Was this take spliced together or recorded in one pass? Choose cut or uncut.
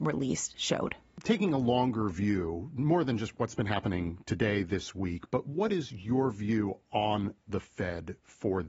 uncut